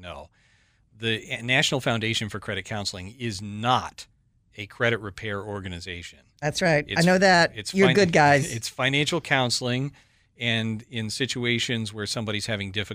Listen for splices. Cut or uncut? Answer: uncut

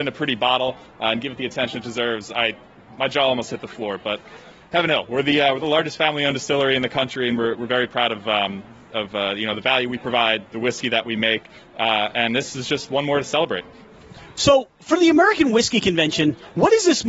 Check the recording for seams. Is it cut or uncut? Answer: uncut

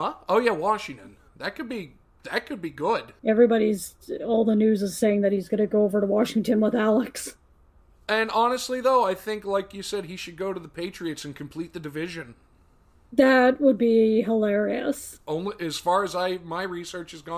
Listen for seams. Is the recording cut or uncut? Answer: cut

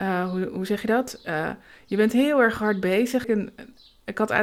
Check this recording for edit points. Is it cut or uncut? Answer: cut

